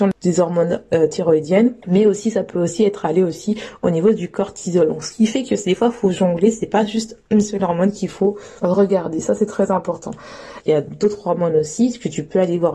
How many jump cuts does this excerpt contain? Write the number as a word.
one